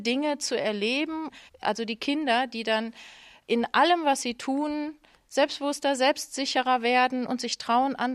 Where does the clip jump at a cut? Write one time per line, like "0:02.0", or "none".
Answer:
0:01.5